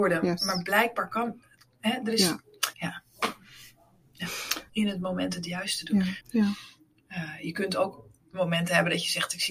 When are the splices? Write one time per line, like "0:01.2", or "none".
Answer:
0:02.7
0:04.7
0:06.2